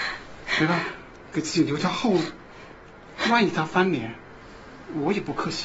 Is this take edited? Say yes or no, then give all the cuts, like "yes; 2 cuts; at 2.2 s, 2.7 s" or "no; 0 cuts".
no; 0 cuts